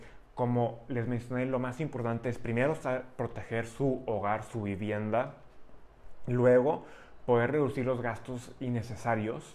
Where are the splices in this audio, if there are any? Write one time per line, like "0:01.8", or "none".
none